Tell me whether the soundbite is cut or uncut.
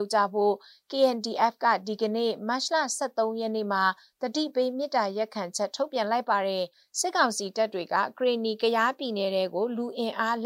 uncut